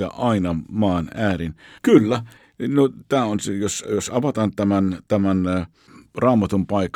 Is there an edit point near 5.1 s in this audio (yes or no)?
no